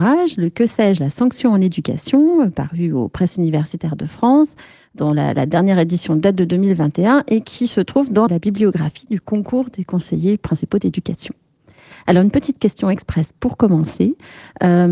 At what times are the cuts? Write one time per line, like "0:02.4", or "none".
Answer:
0:08.3